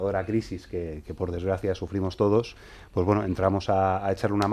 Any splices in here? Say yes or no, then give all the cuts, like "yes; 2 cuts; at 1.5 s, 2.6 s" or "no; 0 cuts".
yes; 1 cut; at 1.0 s